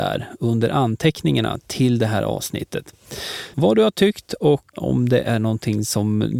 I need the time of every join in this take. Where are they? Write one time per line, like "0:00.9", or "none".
0:03.5
0:04.7

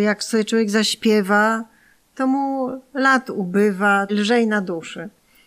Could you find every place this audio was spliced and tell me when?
0:04.1

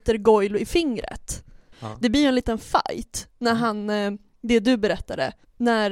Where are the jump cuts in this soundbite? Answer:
0:01.7

